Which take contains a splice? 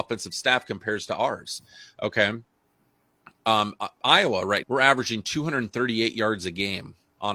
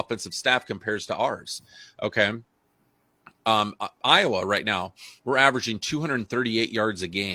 first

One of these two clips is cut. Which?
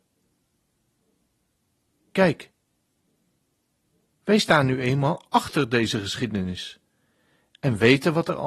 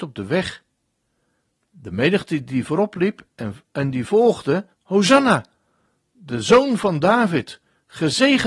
second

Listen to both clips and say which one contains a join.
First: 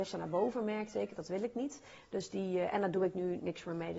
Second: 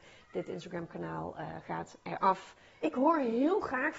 second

